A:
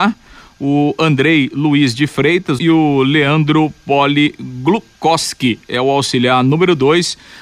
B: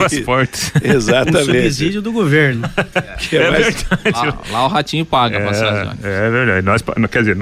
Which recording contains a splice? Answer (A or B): A